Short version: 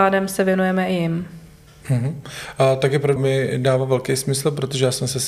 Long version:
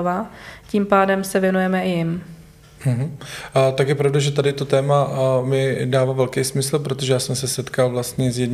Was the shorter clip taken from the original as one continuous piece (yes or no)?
no